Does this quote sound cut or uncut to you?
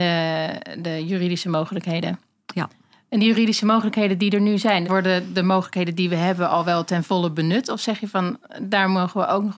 cut